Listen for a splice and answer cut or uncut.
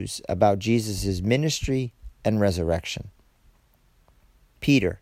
cut